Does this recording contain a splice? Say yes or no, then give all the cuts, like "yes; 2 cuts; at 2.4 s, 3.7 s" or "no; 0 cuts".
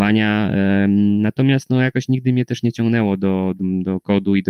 yes; 1 cut; at 3.6 s